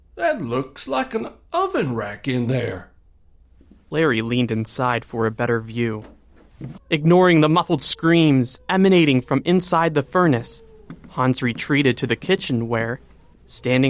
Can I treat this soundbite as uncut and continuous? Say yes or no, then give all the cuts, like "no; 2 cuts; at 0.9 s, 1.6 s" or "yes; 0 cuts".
no; 1 cut; at 6.8 s